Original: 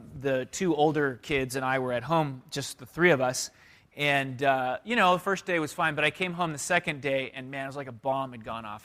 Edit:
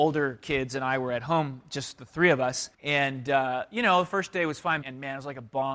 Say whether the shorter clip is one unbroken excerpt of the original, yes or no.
no